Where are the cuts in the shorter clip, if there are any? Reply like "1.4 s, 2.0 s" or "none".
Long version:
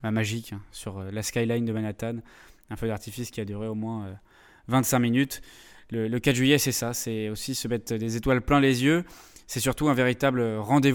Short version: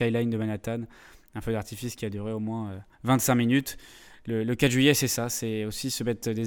2.9 s